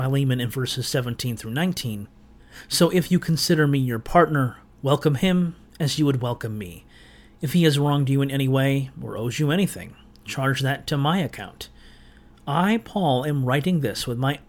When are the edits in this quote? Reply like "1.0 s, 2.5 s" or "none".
none